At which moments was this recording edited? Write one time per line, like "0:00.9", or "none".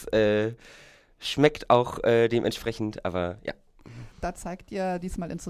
0:04.1